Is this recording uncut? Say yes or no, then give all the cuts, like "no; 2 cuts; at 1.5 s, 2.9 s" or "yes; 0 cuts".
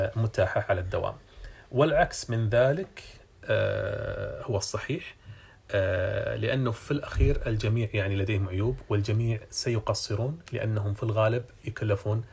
yes; 0 cuts